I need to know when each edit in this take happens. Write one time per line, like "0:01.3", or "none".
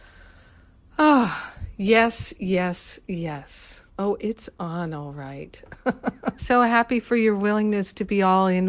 0:03.9
0:06.4